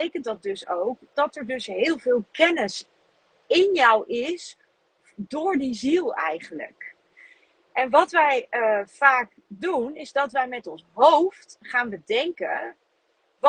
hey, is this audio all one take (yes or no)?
yes